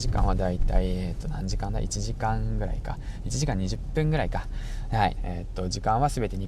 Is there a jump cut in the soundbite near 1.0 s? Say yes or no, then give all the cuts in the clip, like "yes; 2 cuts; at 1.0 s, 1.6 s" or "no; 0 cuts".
no; 1 cut; at 5.2 s